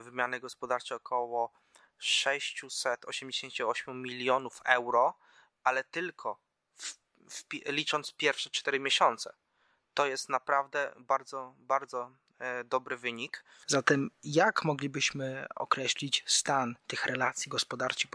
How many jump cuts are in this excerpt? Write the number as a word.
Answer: two